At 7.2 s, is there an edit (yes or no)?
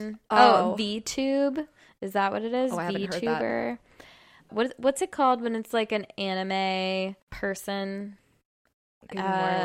yes